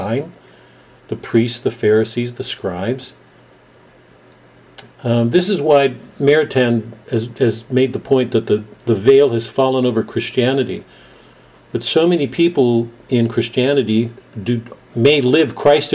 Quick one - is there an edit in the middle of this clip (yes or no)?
yes